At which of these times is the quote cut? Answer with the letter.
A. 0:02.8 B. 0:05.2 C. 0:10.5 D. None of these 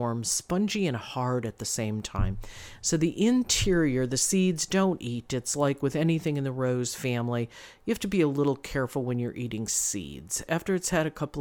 C